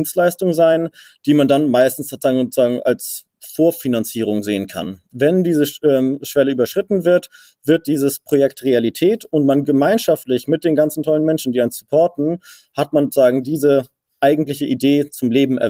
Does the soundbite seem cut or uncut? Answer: cut